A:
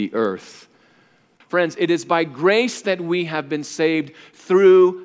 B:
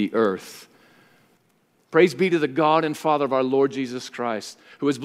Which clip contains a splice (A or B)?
A